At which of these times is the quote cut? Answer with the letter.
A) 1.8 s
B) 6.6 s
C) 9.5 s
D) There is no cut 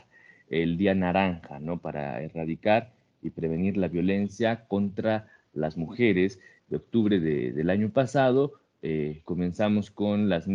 B